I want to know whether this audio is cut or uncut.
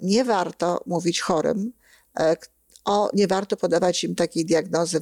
cut